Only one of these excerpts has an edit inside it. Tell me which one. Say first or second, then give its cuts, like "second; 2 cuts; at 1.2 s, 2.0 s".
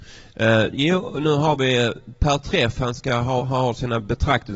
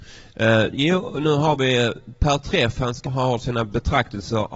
second; 1 cut; at 3.1 s